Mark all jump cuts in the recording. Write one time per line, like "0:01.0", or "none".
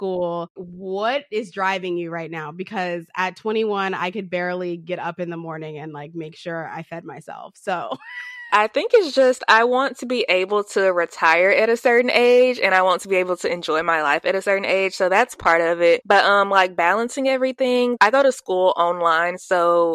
none

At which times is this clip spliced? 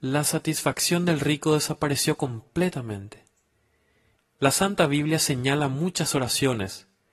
0:04.2

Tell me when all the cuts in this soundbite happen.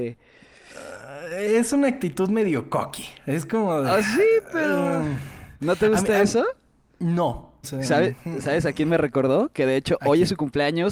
0:07.6

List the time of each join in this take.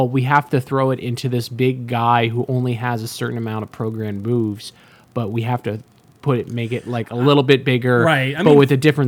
none

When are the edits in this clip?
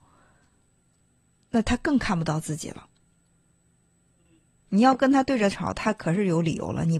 none

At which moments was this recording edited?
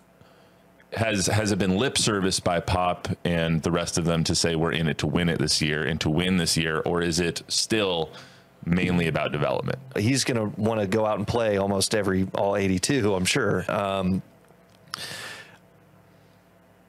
0:09.9
0:13.7

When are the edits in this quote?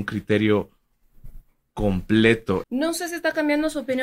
0:02.6

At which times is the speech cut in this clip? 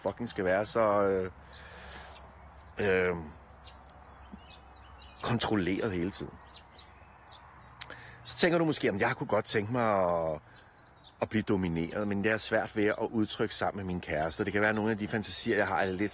0:11.2

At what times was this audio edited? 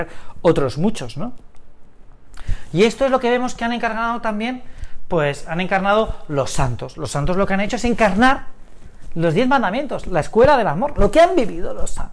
none

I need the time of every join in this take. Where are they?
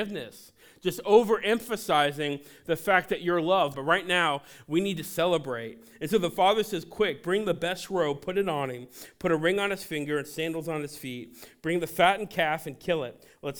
0:03.7

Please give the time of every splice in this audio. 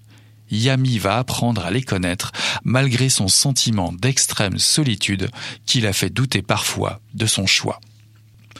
0:02.6

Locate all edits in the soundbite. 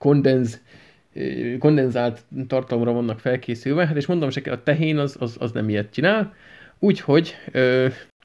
none

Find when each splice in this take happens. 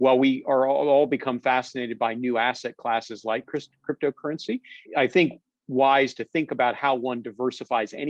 0:04.8

